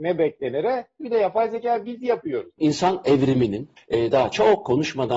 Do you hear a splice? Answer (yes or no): yes